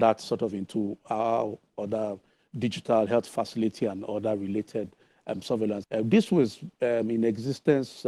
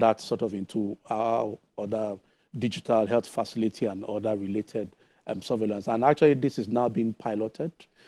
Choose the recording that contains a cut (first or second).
first